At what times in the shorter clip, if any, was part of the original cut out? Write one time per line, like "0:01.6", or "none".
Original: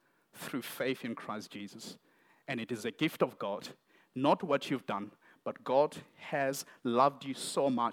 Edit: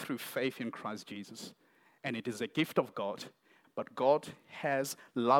0:03.6